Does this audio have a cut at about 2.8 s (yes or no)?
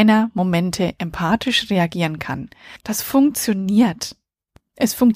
yes